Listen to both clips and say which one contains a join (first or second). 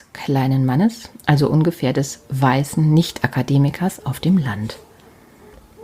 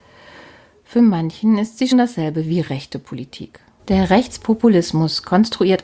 second